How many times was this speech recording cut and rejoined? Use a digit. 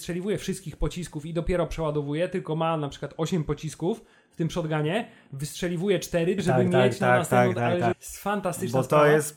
2